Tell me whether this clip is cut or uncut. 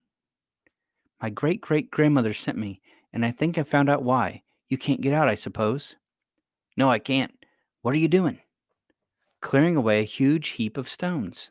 uncut